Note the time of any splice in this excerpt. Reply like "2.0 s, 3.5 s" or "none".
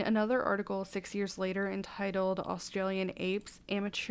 none